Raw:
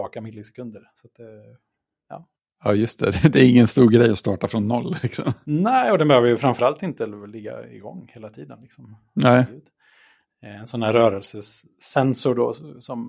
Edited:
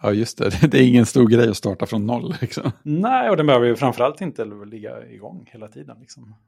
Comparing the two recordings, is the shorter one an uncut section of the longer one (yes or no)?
yes